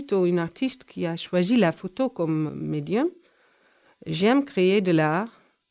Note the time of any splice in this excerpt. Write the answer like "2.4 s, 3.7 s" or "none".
2.5 s